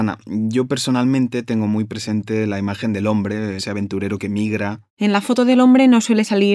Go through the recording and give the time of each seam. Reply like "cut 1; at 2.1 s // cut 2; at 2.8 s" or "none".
cut 1; at 3.6 s // cut 2; at 4.9 s